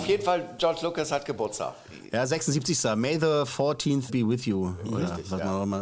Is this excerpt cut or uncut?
cut